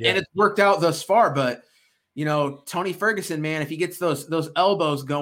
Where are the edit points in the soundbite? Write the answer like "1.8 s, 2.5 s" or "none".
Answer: none